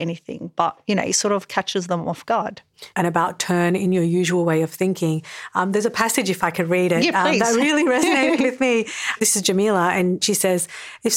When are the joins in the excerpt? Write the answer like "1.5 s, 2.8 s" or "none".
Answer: 2.9 s

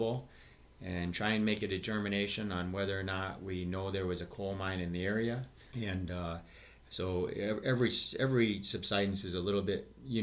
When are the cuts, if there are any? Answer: 5.7 s

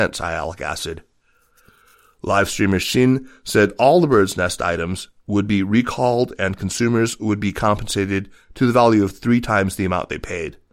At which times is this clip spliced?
none

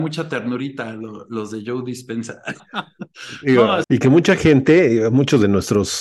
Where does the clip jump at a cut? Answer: 2.6 s, 3.8 s

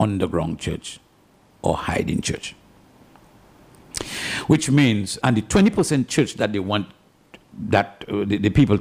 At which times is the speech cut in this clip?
5.2 s

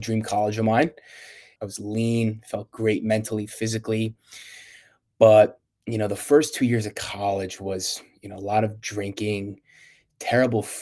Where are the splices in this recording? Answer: 1.6 s

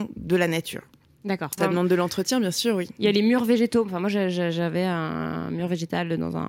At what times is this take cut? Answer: 1.6 s

